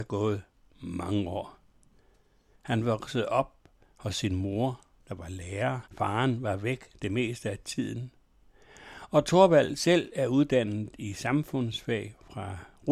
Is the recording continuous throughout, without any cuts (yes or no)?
no